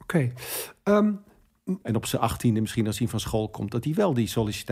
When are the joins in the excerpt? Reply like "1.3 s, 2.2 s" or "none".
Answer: 1.8 s

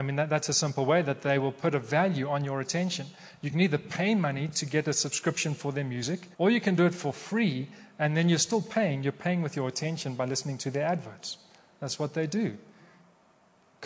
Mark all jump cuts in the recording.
6.3 s

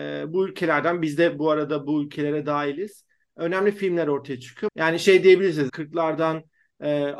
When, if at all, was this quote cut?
4.7 s, 5.7 s

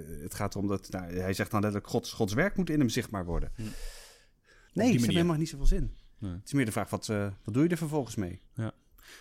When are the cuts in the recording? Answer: 4.7 s

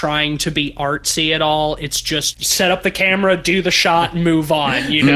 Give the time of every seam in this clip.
none

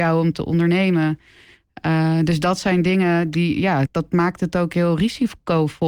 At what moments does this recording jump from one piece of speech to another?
3.9 s

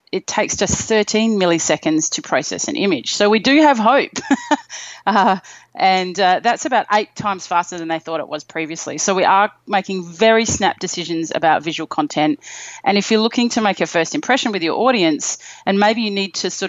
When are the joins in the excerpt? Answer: none

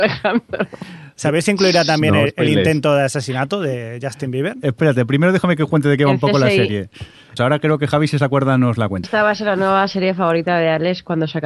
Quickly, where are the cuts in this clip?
7.4 s, 9.0 s

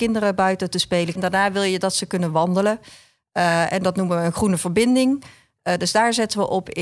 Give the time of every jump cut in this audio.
1.2 s

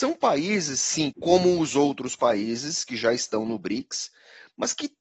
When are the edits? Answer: 1.1 s

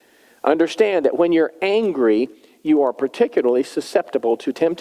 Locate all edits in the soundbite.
none

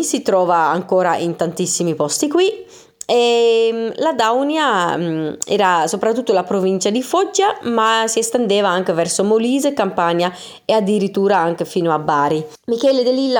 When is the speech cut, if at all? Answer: none

